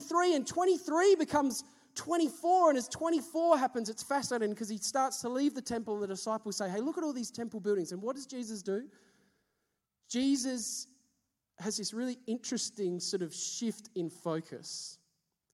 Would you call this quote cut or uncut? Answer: uncut